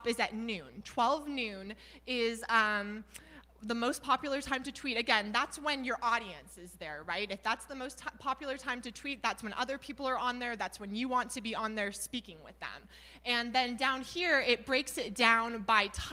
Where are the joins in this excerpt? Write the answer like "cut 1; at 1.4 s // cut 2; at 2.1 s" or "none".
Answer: none